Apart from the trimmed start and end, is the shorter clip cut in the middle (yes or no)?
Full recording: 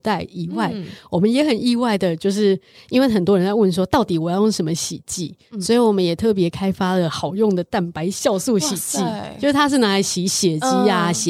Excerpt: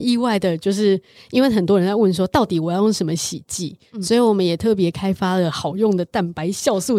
no